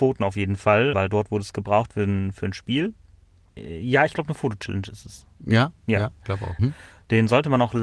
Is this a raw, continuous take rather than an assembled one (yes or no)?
no